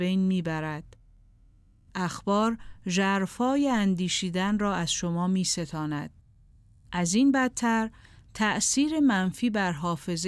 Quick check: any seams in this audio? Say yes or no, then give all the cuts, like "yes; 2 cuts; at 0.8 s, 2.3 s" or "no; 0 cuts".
no; 0 cuts